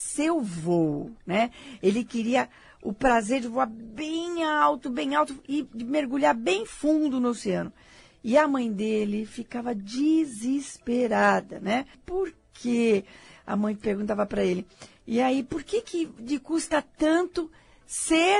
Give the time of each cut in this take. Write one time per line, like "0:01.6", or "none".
0:11.9